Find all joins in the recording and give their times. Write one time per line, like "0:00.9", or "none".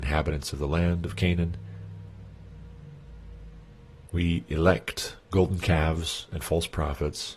0:04.1
0:05.2